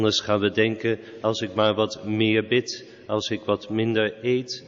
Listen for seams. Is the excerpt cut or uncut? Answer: uncut